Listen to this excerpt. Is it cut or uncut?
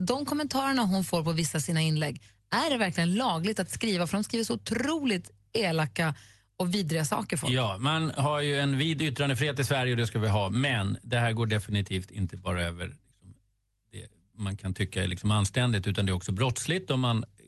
uncut